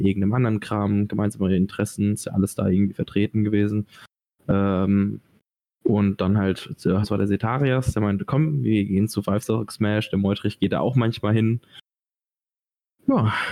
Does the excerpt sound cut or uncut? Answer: cut